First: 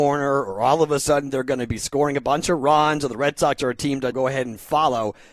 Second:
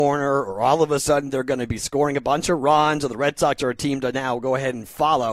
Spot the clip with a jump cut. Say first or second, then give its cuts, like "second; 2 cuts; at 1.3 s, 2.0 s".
first; 1 cut; at 4.1 s